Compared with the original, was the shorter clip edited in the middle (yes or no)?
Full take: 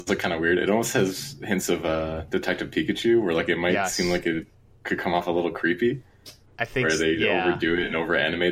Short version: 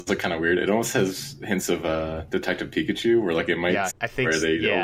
yes